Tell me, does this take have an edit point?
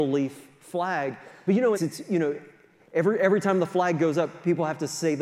yes; 1 cut; at 1.7 s

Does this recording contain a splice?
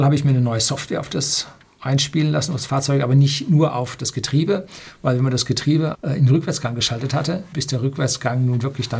yes; 2 cuts; at 5.9 s, 7.5 s

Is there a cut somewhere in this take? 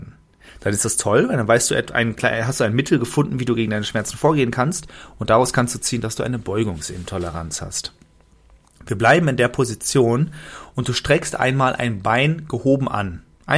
no; 0 cuts

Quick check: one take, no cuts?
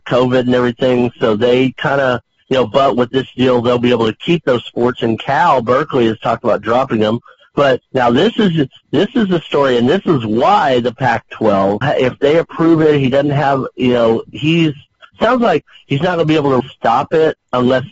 no; 2 cuts; at 11.8 s, 16.6 s

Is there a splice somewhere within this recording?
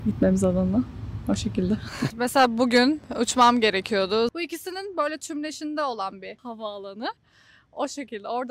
yes; 2 cuts; at 2.1 s, 4.3 s

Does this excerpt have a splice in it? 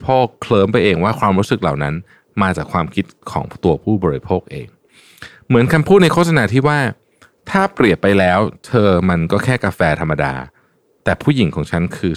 no; 0 cuts

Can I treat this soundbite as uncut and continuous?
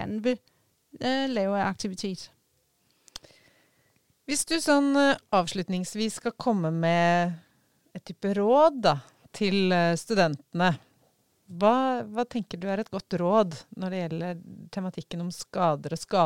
yes; 0 cuts

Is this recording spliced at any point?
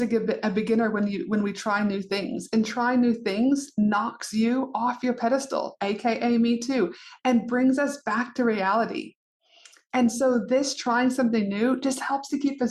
no; 0 cuts

